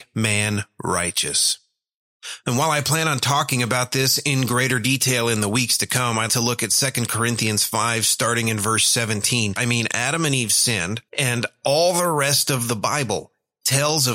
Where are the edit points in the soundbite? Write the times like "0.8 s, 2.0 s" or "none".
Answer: 6.3 s, 9.6 s, 11.1 s